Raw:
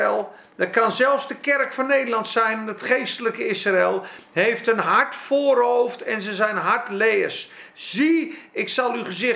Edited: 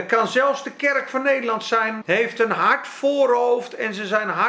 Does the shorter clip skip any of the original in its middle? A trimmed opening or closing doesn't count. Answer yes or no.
yes